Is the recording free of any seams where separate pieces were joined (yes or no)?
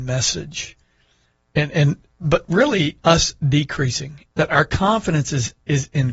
no